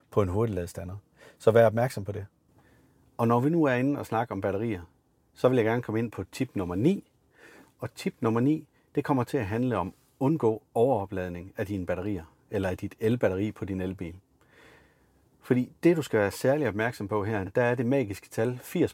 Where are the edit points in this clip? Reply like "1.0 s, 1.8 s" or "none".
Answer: 17.5 s